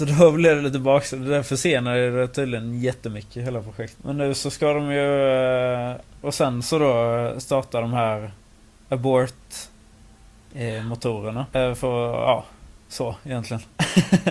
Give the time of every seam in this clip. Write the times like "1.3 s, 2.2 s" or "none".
3.9 s, 6.2 s, 11.5 s